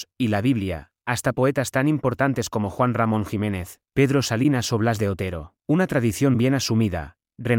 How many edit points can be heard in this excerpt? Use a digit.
2